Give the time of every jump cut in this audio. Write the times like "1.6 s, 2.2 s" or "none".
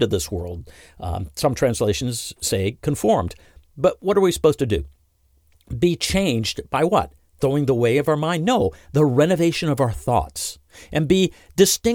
none